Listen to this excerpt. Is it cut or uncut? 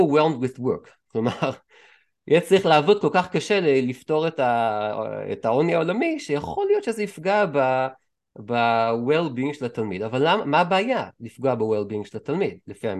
uncut